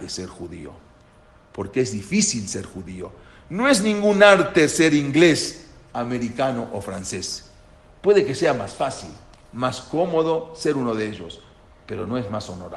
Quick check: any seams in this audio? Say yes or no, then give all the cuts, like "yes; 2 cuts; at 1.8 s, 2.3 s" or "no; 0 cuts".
no; 0 cuts